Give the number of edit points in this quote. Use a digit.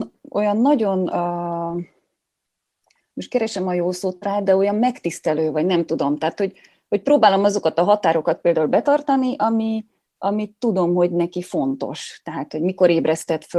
1